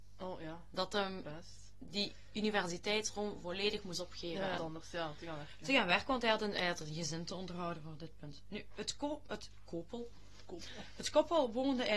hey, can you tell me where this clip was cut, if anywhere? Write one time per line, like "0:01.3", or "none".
0:04.6